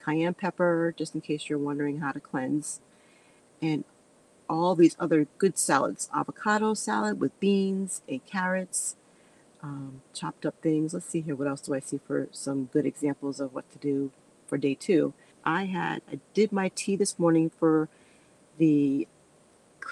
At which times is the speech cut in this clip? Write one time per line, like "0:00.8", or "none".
0:15.3